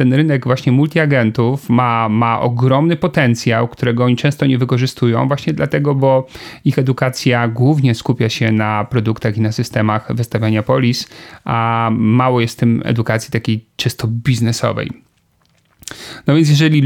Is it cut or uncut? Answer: uncut